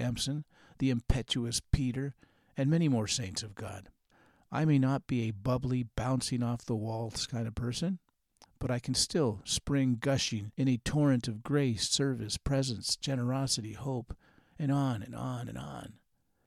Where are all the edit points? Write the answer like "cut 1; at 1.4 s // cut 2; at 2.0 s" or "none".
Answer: none